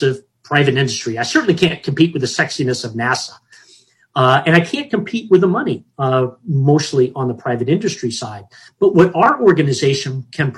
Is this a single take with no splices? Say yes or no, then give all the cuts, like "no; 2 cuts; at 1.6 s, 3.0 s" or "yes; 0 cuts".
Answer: yes; 0 cuts